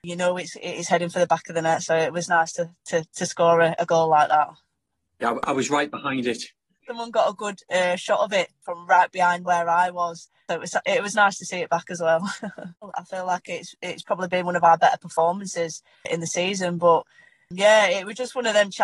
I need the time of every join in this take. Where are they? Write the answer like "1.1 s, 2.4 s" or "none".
6.8 s, 12.8 s